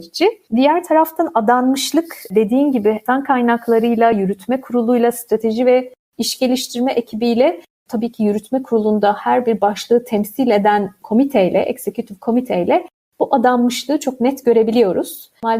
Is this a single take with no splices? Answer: yes; 0 cuts

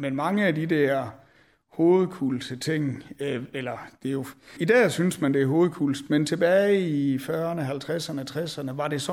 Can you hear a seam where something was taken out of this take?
yes; 1 cut; at 4.6 s

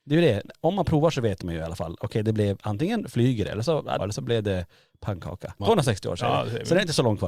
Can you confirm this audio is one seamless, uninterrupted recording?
no; 2 cuts; at 4.0 s, 5.6 s

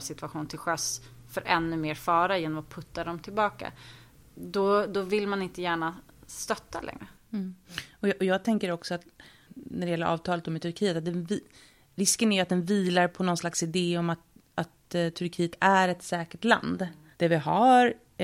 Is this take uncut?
no; 1 cut; at 17.1 s

